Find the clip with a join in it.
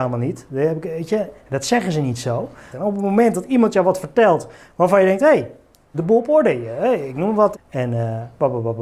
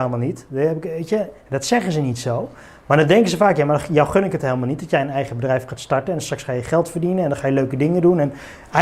first; 3 cuts; at 2.7 s, 5.9 s, 7.5 s

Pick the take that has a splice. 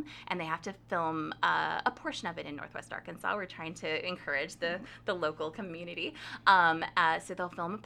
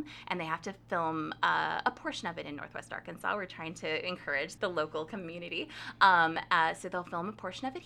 second; 1 cut; at 4.6 s

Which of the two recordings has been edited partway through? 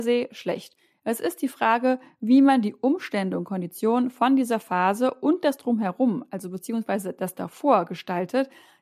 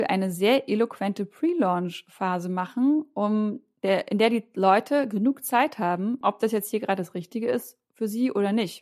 second; 1 cut; at 6.2 s

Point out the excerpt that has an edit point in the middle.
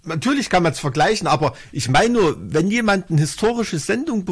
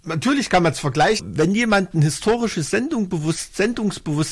second; 1 cut; at 1.2 s

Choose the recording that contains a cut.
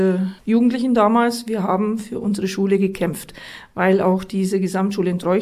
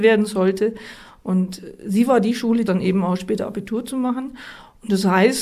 second; 1 cut; at 2.7 s

